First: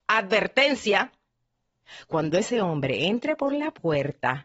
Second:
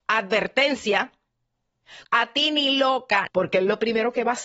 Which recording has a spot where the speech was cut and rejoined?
second; 2 cuts; at 2.0 s, 3.3 s

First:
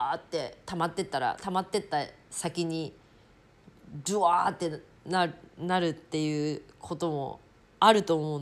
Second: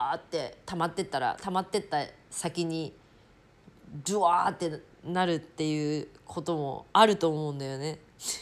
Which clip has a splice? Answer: second; 2 cuts; at 4.9 s, 6.9 s

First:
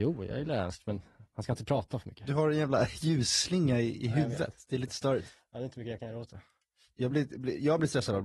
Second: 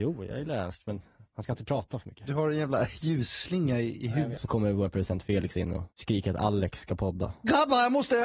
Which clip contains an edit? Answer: second; 2 cuts; at 4.4 s, 5.9 s

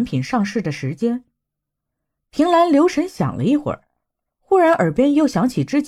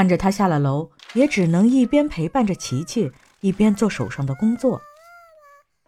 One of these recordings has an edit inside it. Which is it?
second; 1 cut; at 1.0 s

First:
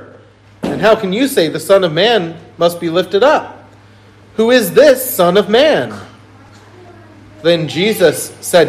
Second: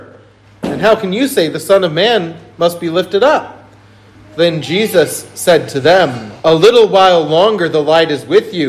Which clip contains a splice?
second; 2 cuts; at 4.1 s, 6.4 s

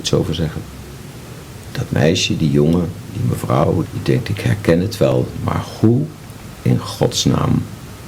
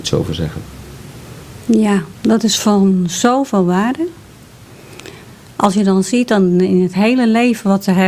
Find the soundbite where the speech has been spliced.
first; 2 cuts; at 1.6 s, 3.8 s

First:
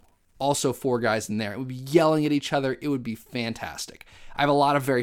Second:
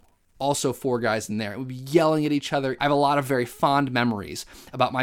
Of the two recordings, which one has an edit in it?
second; 1 cut; at 2.8 s

